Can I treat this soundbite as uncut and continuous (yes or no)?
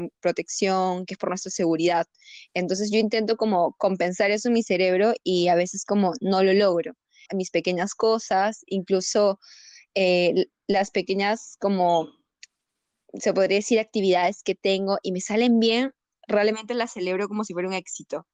no